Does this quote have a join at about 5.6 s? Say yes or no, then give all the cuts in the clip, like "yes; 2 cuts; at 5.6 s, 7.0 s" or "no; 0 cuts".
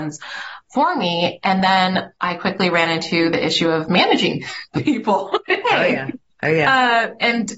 yes; 1 cut; at 5.6 s